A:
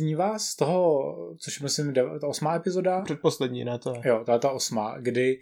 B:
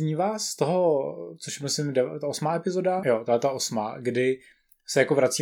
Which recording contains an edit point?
B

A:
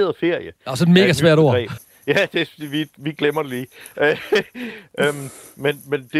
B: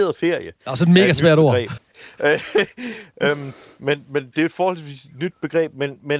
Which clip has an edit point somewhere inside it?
B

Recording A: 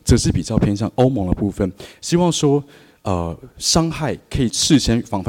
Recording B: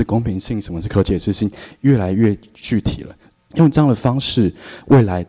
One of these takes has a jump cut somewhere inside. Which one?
B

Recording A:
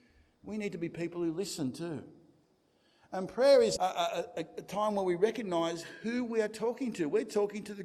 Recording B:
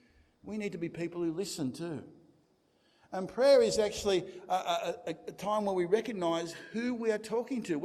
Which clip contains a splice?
A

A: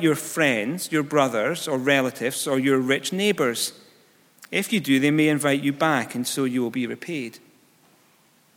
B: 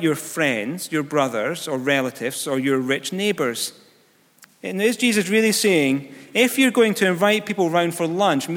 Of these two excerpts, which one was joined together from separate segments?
B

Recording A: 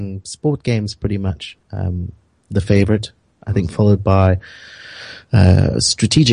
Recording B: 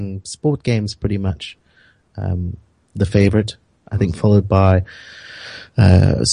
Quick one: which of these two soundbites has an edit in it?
A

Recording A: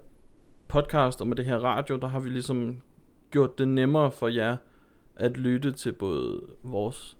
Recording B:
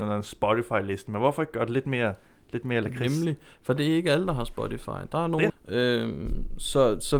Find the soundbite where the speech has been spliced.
B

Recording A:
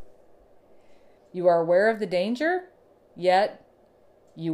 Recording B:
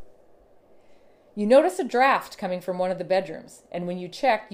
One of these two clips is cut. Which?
A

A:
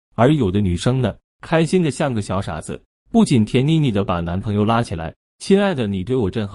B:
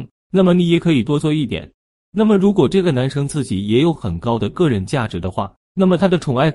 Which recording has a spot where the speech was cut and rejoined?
A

